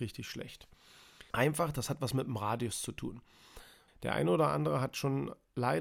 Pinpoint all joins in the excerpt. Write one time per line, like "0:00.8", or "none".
0:01.3
0:03.9